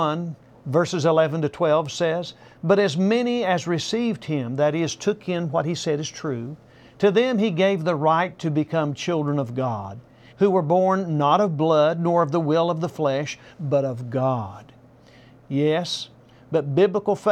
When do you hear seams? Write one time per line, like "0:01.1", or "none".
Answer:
0:10.3
0:13.5
0:16.3